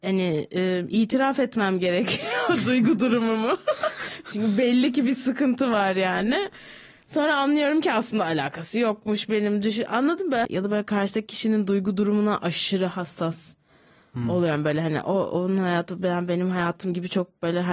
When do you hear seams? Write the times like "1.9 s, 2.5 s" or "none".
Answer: 10.4 s